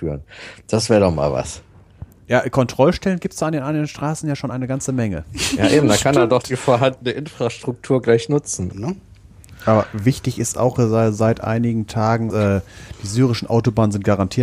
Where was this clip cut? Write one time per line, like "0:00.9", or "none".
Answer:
0:08.7
0:12.3

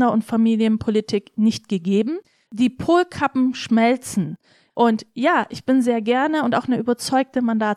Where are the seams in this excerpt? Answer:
0:02.5
0:04.7

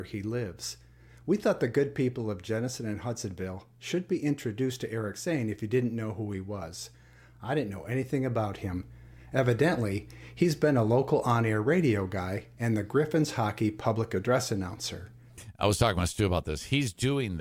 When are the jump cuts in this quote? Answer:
none

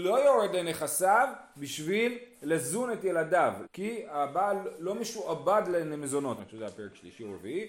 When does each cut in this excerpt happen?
0:03.6
0:06.4

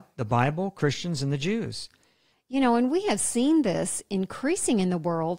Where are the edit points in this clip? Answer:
0:02.3

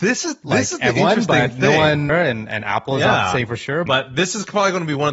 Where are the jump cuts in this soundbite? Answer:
0:02.1
0:03.9

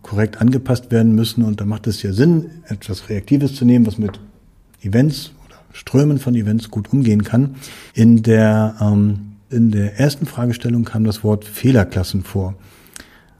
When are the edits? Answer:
0:07.9
0:09.5

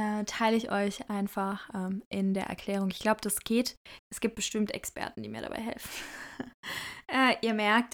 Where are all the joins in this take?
0:04.0

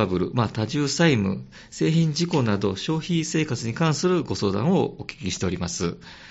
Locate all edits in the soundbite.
none

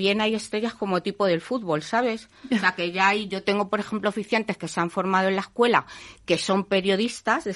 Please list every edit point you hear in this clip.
none

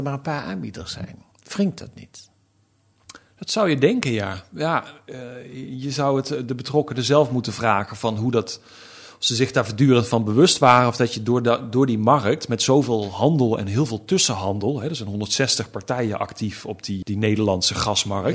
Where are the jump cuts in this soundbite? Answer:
0:01.3
0:17.0

